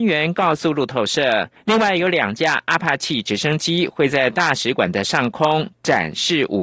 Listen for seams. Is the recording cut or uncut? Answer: cut